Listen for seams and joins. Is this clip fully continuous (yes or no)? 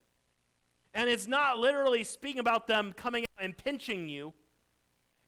yes